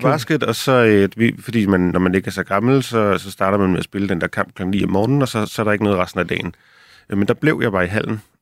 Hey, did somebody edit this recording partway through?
no; 0 cuts

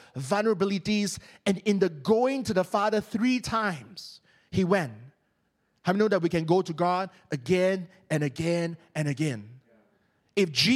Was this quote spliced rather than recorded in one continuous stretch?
no; 0 cuts

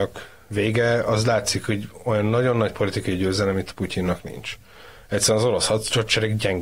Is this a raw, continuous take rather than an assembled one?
yes; 0 cuts

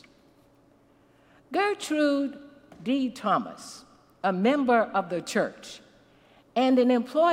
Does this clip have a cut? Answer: no; 0 cuts

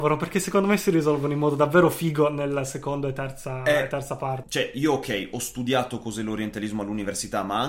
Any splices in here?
yes; 1 cut; at 4.4 s

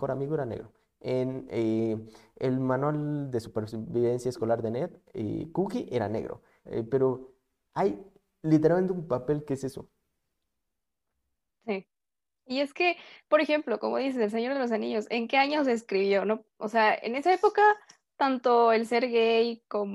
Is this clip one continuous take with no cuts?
no; 1 cut; at 6.7 s

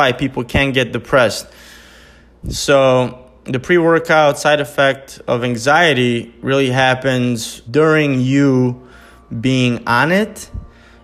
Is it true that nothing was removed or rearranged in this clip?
no; 2 cuts; at 2.4 s, 7.7 s

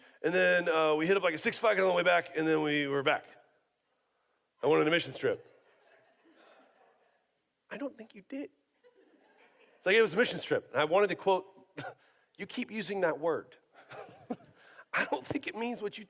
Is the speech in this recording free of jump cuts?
yes; 0 cuts

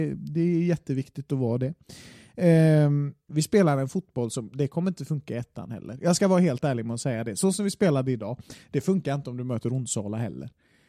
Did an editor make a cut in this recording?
yes; 1 cut; at 3.3 s

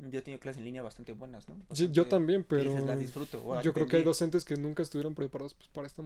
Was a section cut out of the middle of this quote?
no; 0 cuts

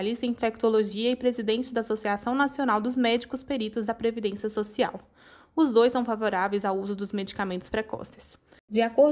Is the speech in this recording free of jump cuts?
yes; 0 cuts

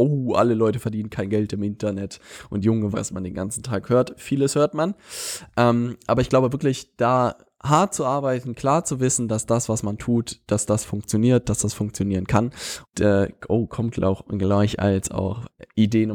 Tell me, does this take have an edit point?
yes; 2 cuts; at 2.9 s, 12.8 s

